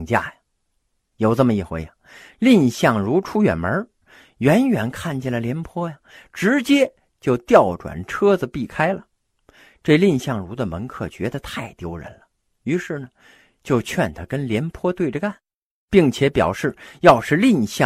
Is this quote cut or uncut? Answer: uncut